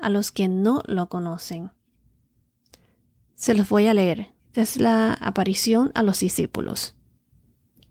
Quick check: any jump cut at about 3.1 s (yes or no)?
no